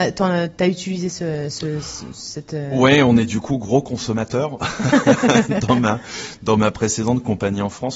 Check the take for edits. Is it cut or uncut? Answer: uncut